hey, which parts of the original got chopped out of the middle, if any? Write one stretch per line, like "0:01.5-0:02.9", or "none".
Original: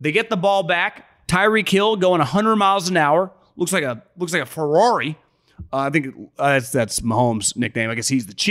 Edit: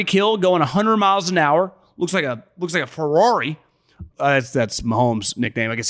0:05.7-0:06.3